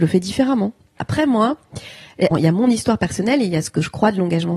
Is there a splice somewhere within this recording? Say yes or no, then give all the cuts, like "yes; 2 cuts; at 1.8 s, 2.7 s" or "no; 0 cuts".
yes; 2 cuts; at 1.0 s, 2.3 s